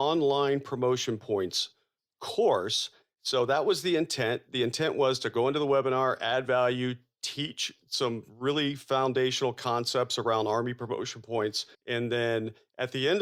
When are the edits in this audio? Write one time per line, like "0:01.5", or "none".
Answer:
0:11.7